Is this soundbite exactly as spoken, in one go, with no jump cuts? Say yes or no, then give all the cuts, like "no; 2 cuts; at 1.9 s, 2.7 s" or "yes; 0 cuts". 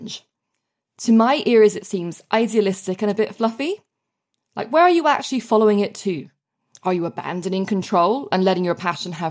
yes; 0 cuts